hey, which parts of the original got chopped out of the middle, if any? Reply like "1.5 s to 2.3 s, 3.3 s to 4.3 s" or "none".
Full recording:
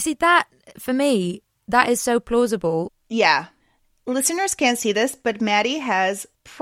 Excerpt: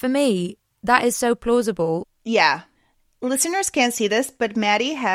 none